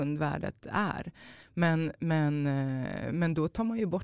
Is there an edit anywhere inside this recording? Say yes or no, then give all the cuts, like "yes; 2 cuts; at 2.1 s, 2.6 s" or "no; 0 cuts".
yes; 1 cut; at 1.4 s